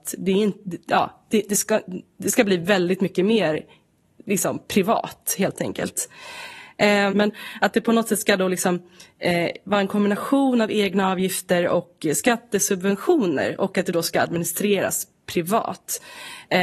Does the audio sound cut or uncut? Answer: cut